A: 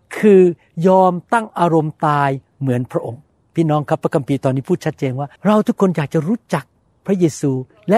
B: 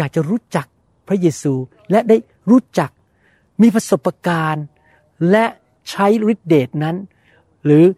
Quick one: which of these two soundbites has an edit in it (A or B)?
A